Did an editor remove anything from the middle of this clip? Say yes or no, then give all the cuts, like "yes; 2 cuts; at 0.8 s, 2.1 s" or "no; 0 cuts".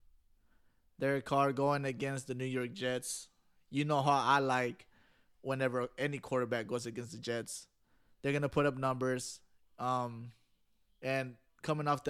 no; 0 cuts